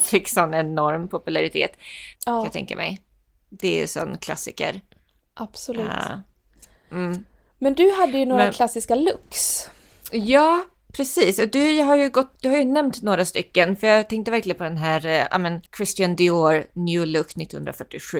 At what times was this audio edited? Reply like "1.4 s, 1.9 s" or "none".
2.2 s, 15.7 s